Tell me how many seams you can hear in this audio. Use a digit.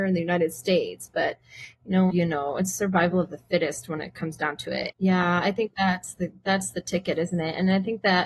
2